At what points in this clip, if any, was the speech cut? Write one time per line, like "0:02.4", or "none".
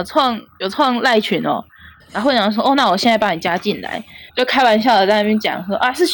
0:02.0
0:04.3